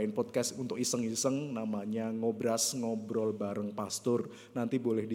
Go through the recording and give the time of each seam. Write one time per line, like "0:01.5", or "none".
none